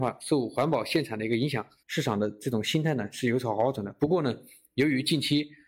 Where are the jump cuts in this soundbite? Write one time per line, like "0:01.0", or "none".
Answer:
0:01.8